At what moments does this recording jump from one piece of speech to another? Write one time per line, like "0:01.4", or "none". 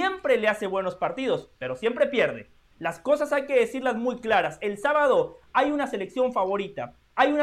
none